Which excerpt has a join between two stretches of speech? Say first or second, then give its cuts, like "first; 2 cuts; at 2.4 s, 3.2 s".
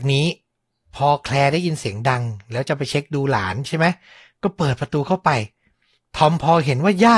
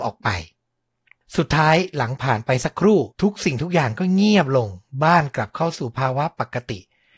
second; 1 cut; at 3.1 s